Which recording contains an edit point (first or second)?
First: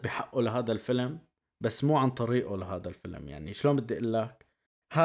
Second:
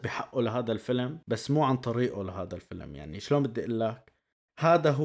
second